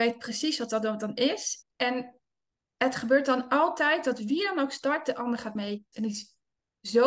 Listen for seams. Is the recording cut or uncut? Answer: cut